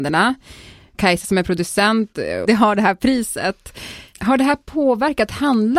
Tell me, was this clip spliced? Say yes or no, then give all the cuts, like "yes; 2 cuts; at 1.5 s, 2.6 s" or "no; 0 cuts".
yes; 1 cut; at 2.5 s